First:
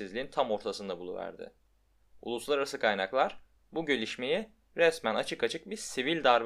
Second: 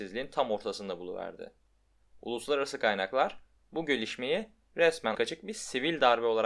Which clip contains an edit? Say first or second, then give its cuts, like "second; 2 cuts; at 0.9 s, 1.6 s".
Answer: second; 1 cut; at 5.1 s